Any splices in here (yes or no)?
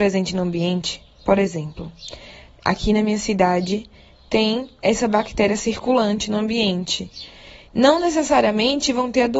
yes